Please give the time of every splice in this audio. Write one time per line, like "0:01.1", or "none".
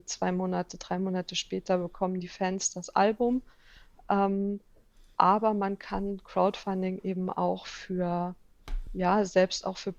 none